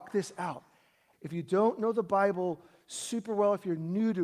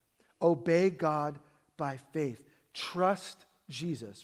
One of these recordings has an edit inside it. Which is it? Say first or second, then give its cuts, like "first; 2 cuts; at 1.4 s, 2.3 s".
first; 1 cut; at 1.1 s